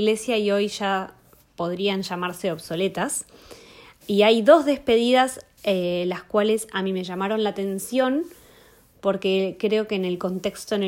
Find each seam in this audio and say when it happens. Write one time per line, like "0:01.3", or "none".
none